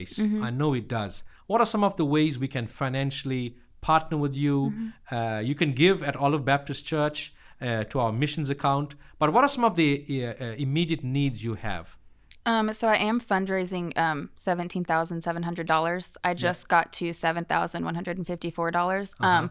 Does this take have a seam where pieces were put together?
no; 0 cuts

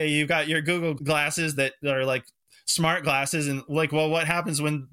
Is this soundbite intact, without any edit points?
yes; 0 cuts

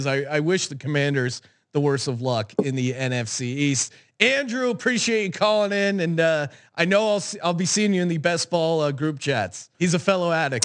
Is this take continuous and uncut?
no; 1 cut; at 9.7 s

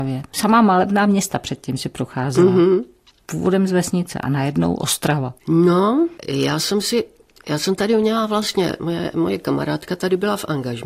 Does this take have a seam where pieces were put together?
no; 0 cuts

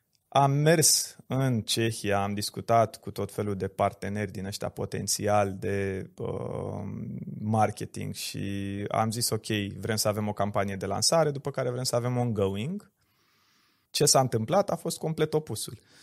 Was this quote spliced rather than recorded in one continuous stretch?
yes; 1 cut; at 13.9 s

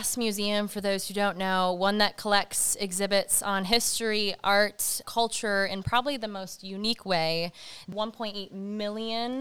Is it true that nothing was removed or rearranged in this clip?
no; 1 cut; at 5.0 s

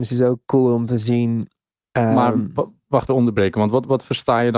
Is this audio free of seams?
no; 1 cut; at 3.1 s

